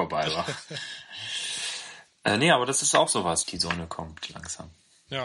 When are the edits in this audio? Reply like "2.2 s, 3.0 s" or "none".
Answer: 3.4 s